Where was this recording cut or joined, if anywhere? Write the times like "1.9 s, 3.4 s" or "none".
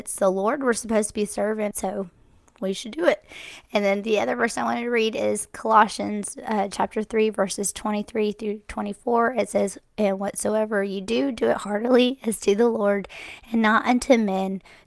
1.7 s